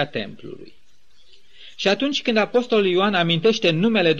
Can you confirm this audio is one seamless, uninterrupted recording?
yes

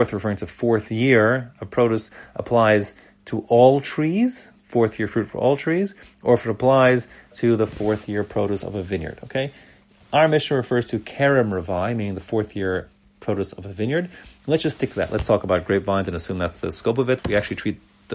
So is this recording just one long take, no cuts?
no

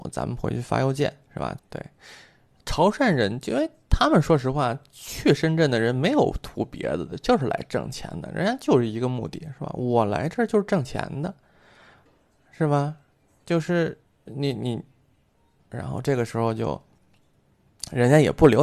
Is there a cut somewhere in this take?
yes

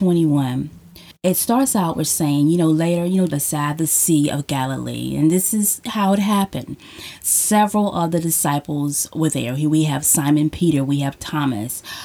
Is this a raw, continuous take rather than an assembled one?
no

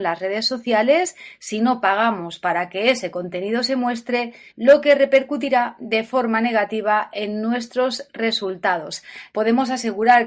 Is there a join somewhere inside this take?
yes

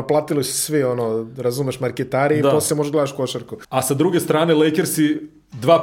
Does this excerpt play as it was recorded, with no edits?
no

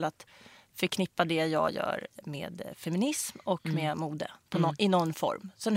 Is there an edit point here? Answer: yes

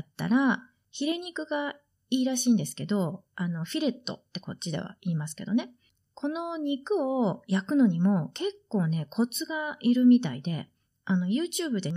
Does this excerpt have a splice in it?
no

